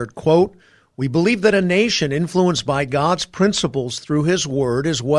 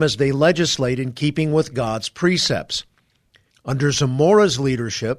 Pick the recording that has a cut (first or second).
second